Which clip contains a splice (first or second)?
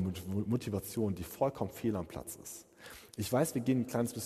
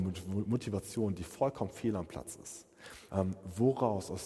second